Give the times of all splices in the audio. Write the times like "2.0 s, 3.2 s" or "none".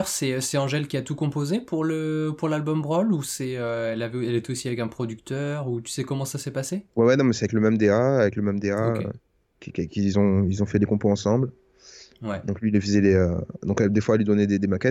none